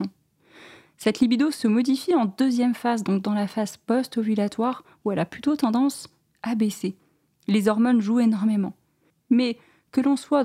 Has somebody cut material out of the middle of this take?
yes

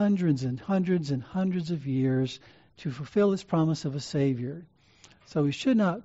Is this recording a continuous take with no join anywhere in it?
yes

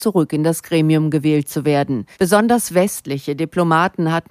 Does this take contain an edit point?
yes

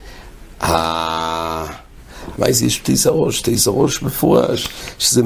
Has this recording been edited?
yes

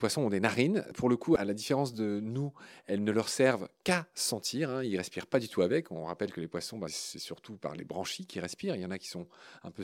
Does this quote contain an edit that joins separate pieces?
no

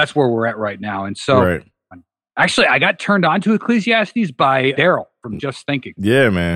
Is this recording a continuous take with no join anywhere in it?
no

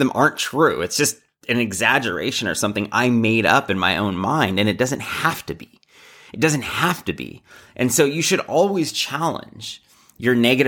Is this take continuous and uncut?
yes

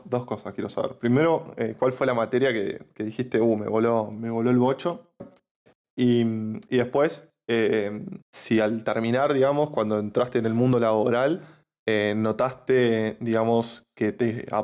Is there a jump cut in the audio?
yes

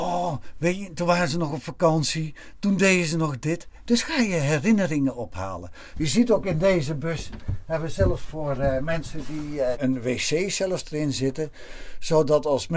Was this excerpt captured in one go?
no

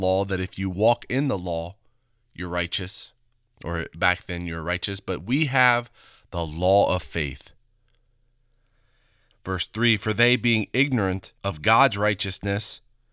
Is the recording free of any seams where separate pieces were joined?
no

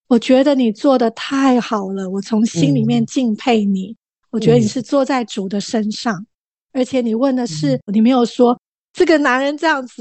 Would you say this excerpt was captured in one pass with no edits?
no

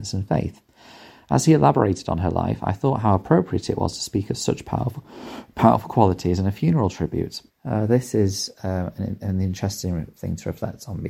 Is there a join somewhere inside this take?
yes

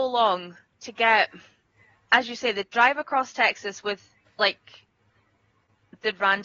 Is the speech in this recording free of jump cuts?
yes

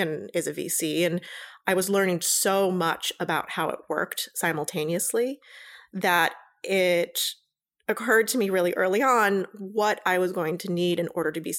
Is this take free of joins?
yes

